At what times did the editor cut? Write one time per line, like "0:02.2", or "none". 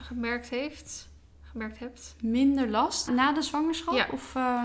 0:03.1